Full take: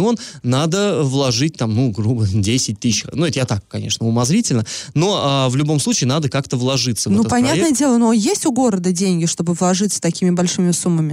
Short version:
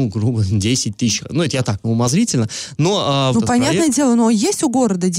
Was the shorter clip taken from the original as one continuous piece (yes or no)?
no